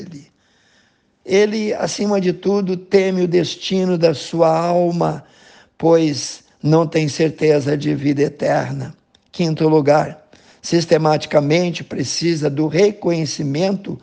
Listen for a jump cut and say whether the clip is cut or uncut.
cut